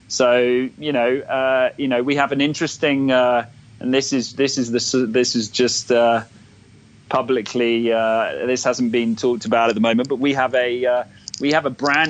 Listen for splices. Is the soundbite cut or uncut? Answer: uncut